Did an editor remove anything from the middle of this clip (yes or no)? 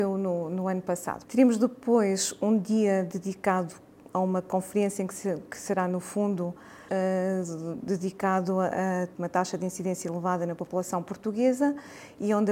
yes